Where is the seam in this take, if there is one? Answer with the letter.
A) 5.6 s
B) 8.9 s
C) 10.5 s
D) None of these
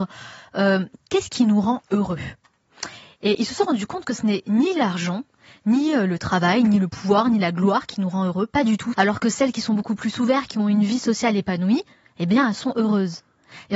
B